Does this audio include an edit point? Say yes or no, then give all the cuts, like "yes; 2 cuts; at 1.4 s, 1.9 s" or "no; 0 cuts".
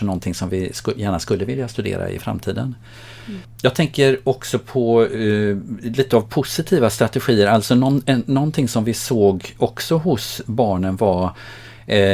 no; 0 cuts